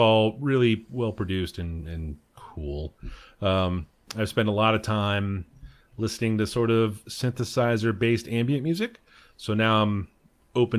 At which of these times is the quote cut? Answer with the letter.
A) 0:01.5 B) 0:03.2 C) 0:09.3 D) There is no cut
D